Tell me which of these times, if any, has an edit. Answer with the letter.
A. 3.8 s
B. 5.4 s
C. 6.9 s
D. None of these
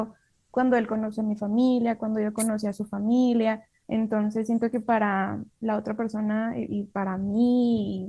A